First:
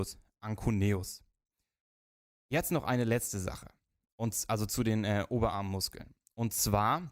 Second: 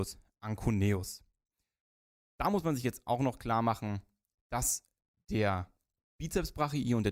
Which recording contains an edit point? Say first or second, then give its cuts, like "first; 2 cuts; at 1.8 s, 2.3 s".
first; 1 cut; at 2.3 s